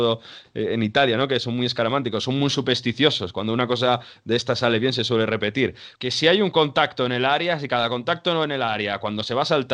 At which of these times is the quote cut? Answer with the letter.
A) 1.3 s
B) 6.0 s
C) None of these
B